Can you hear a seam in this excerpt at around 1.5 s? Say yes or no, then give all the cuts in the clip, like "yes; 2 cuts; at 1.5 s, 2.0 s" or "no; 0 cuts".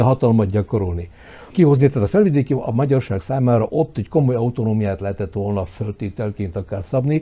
yes; 1 cut; at 1.5 s